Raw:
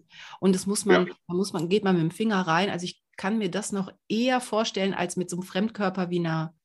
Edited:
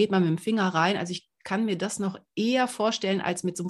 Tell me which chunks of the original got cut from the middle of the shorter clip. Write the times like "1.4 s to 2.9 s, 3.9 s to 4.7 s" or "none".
none